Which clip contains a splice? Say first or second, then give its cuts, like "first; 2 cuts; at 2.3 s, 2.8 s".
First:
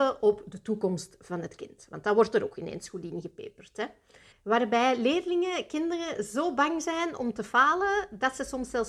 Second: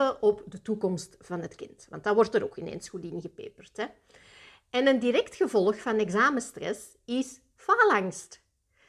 first; 1 cut; at 4.3 s